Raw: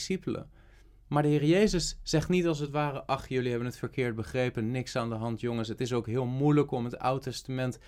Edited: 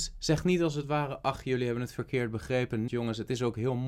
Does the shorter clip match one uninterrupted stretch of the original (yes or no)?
no